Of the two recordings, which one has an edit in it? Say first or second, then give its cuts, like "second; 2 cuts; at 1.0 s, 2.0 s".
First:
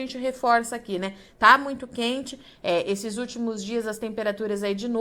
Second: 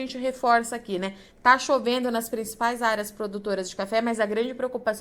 first; 1 cut; at 1.3 s